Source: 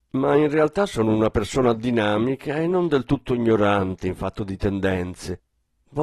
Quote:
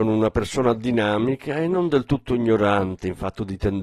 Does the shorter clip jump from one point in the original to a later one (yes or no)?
no